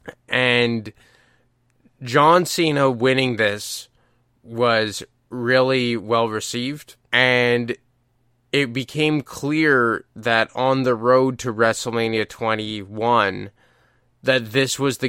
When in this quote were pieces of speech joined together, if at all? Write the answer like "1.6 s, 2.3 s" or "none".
7.1 s